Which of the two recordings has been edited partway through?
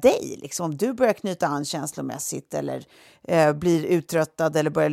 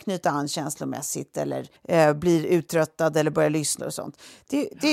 second; 2 cuts; at 1.8 s, 3.8 s

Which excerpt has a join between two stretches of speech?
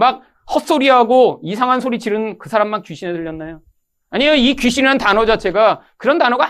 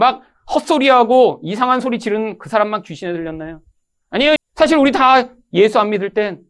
second; 1 cut; at 4.4 s

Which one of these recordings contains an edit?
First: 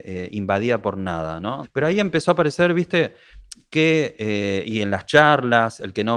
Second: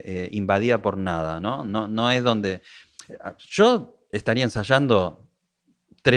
first; 1 cut; at 1.6 s

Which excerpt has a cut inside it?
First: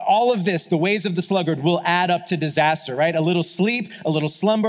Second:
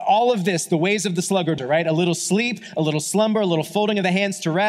second; 1 cut; at 1.6 s

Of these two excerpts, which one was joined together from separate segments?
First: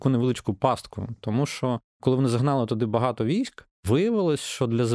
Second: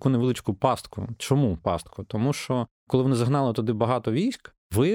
first; 1 cut; at 1.2 s

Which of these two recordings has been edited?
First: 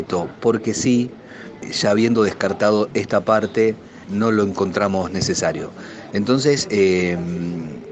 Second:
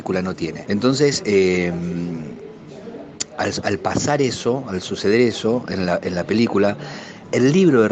first; 1 cut; at 6.1 s

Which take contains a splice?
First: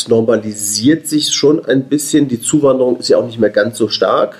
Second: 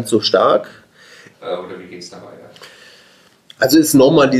second; 1 cut; at 1.3 s

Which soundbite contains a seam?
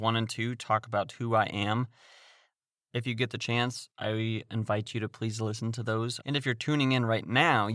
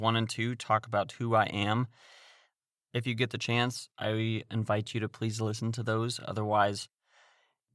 first; 1 cut; at 6.2 s

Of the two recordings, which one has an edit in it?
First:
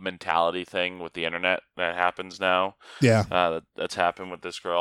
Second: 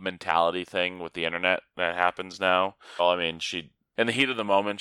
second; 1 cut; at 3.0 s

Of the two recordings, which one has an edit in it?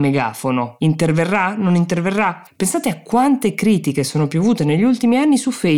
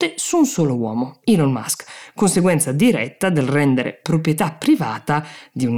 first; 1 cut; at 2.5 s

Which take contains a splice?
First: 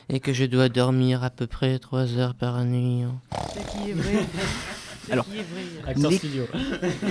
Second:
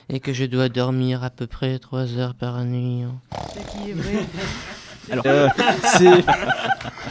second; 1 cut; at 5.2 s

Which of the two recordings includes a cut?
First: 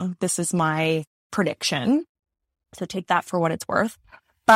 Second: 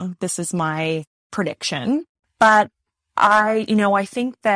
second; 1 cut; at 2.2 s

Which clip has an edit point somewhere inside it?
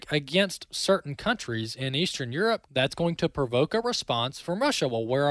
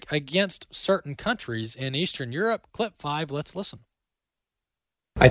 first; 1 cut; at 2.7 s

